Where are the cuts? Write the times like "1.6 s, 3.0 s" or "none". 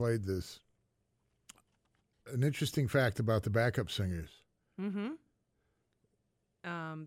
none